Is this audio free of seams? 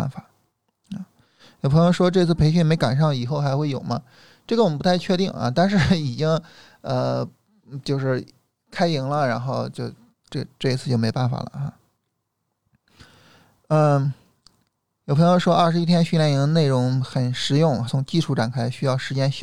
no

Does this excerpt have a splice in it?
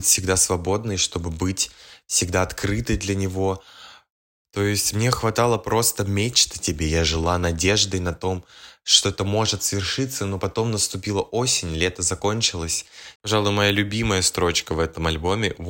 yes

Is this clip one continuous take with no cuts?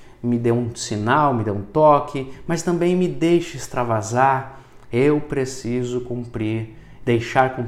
yes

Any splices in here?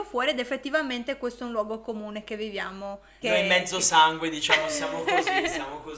yes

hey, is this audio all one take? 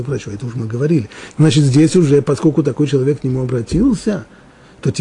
no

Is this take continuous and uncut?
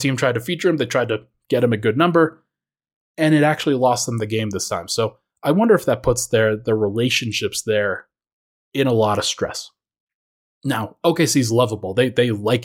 yes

